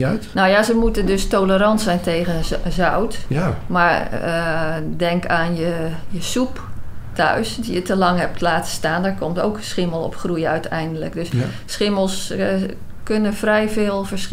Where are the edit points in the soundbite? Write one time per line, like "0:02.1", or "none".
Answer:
none